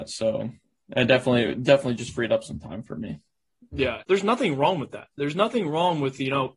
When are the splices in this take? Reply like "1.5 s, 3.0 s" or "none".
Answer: 4.0 s